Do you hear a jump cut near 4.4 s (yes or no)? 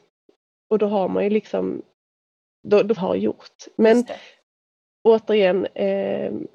no